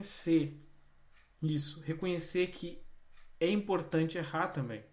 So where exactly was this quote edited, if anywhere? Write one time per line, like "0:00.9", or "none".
none